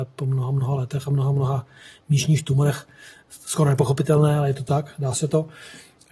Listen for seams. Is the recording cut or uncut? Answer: uncut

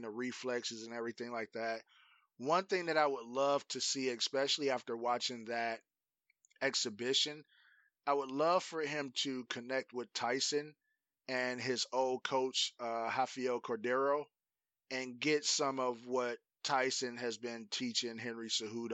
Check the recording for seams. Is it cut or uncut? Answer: uncut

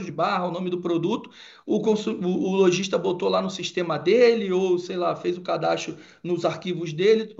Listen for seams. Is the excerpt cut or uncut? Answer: uncut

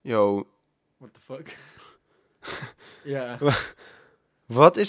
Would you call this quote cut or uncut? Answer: uncut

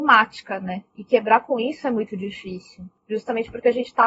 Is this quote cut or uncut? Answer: cut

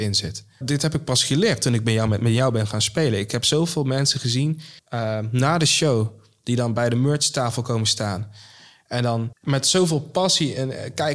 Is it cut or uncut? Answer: cut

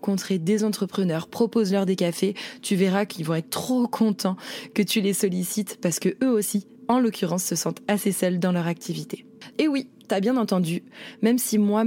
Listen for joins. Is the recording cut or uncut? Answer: cut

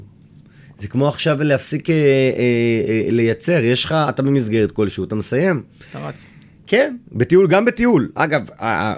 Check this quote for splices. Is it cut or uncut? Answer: uncut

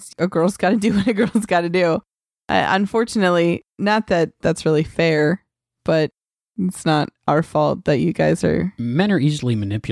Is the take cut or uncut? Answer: uncut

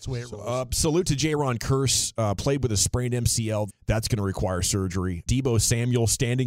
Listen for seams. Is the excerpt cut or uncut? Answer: cut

